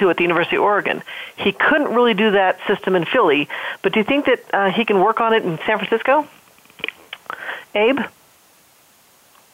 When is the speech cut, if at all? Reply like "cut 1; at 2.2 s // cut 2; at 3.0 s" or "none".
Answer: none